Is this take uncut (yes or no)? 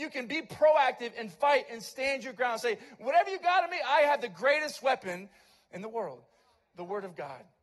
yes